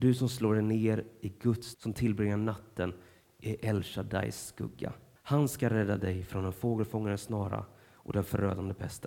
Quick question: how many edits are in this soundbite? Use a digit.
2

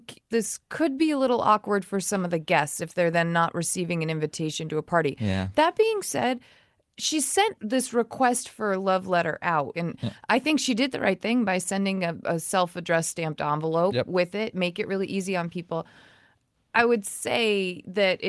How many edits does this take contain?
0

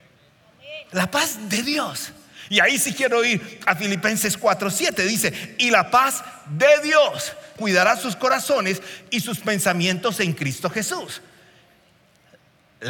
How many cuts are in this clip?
1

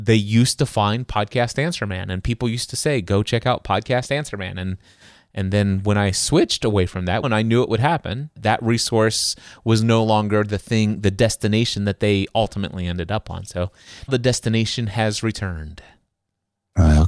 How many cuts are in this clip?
3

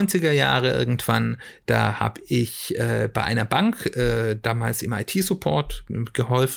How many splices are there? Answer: 0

